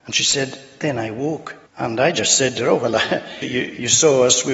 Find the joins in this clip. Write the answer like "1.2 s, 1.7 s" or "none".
1.7 s, 3.4 s

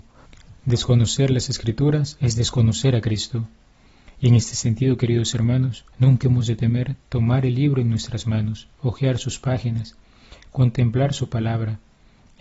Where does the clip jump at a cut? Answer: 5.9 s, 8.8 s

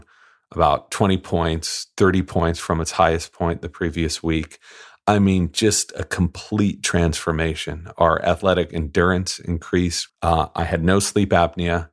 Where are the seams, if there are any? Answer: 10.1 s

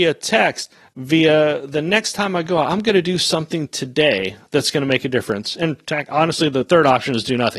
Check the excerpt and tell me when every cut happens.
none

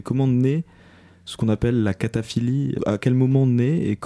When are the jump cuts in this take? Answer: 2.8 s

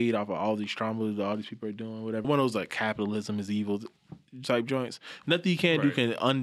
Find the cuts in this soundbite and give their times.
2.2 s, 5.2 s

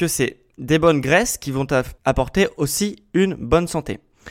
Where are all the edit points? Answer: 2.0 s

